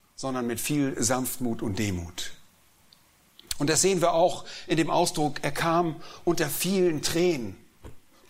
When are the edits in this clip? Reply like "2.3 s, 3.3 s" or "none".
none